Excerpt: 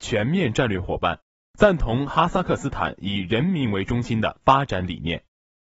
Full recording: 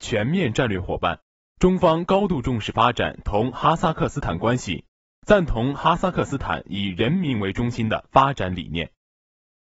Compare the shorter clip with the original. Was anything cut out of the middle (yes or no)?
yes